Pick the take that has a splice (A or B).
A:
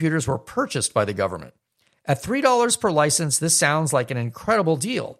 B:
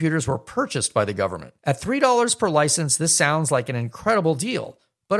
B